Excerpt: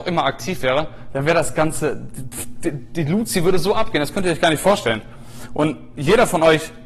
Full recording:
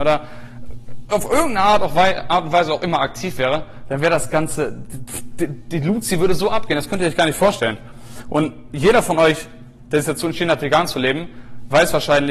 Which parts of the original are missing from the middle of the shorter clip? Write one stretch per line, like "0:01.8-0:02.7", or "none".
none